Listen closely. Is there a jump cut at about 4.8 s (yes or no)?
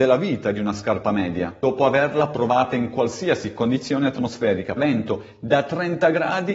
yes